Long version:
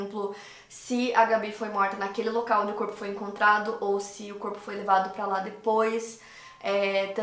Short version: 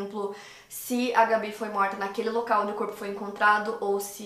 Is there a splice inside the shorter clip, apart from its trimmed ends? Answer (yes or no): no